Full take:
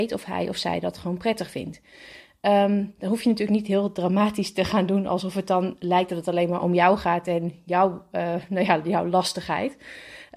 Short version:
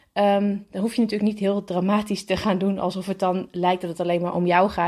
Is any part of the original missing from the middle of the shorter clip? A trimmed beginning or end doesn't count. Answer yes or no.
no